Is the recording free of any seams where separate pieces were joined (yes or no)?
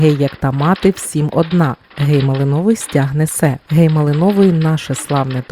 no